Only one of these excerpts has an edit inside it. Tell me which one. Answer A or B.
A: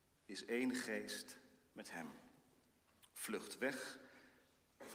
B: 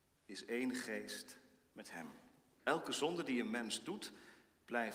B